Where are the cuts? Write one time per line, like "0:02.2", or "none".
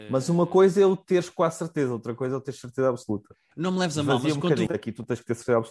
0:03.5
0:04.7

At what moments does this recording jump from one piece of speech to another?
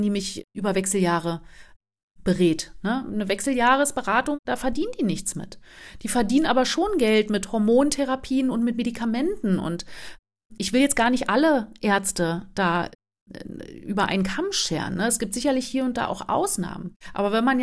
none

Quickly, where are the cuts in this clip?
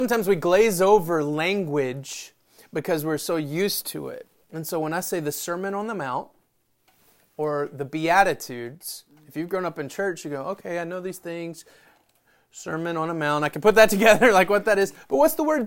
none

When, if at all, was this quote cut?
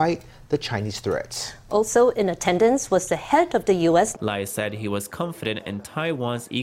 0:04.1

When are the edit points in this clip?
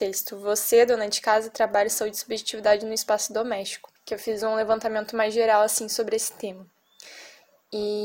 0:04.0

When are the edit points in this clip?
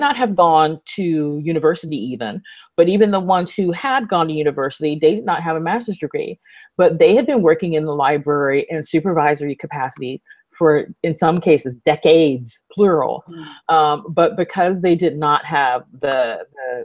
none

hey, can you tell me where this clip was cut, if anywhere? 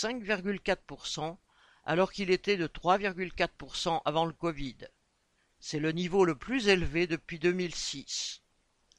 none

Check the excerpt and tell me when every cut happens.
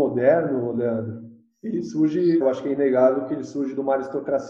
0:02.4

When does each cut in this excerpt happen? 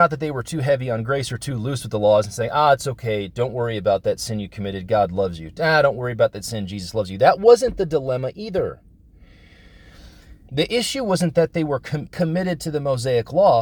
0:10.5
0:12.1

